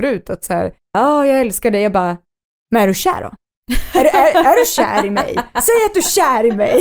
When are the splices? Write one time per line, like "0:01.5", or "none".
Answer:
0:00.9